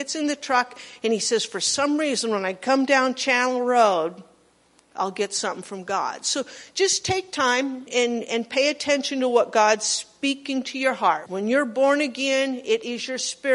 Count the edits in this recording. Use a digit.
2